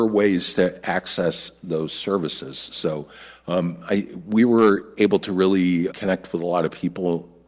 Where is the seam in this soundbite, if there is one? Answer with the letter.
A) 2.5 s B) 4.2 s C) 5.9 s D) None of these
C